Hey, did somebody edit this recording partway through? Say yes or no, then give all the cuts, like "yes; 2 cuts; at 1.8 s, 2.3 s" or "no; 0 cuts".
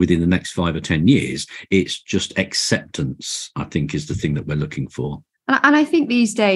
no; 0 cuts